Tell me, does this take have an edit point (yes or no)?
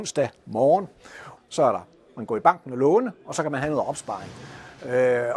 yes